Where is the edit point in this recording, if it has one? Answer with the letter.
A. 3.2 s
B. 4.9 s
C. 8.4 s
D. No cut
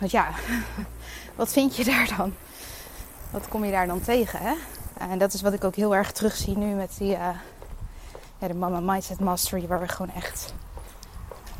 B